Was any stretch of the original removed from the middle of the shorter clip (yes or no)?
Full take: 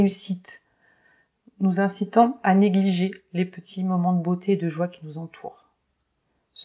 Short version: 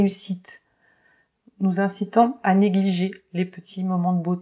no